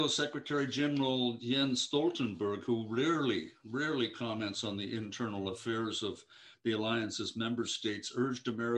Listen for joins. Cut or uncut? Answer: uncut